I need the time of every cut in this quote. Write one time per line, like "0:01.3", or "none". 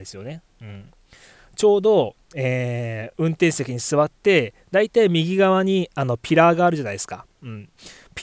none

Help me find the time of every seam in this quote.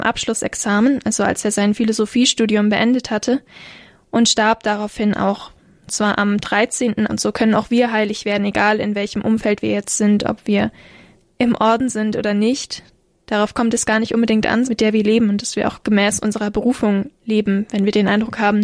0:07.1
0:14.6

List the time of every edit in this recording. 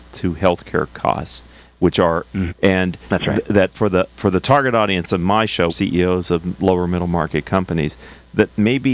0:02.5
0:05.7

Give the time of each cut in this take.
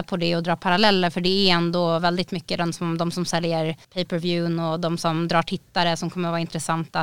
0:03.8

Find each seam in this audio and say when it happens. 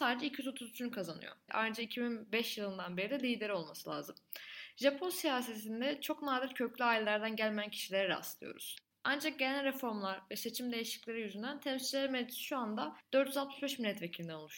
0:01.5
0:08.9

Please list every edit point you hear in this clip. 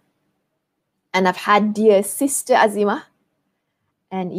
none

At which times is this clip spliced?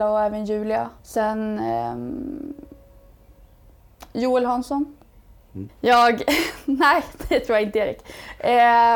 0:01.0
0:05.7

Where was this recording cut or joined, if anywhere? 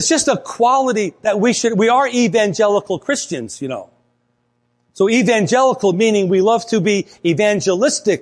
none

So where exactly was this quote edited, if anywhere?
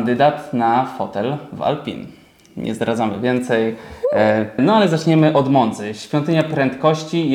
0:04.6

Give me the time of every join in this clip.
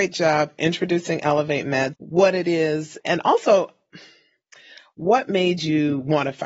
0:01.9
0:03.0

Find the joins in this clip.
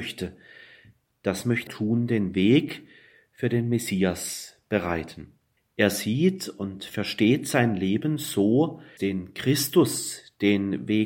0:01.7
0:05.6
0:09.0

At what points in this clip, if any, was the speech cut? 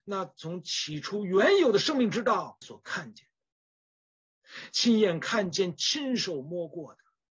0:02.6

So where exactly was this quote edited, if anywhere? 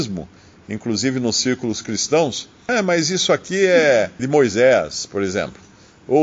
0:02.7
0:04.2

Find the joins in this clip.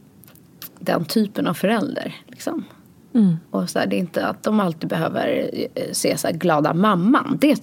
0:03.5

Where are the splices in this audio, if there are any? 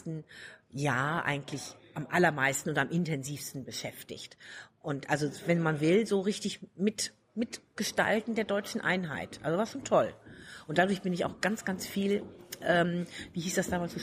none

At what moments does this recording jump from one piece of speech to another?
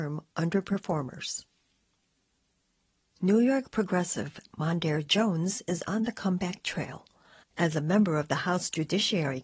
0:07.4

